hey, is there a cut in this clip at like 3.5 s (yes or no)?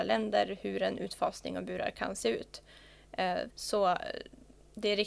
yes